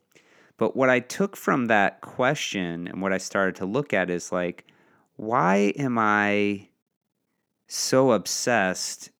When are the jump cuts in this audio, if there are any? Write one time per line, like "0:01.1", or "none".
none